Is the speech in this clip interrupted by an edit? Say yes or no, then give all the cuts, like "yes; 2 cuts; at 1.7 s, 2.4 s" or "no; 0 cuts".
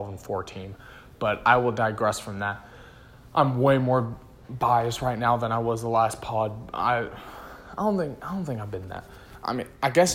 no; 0 cuts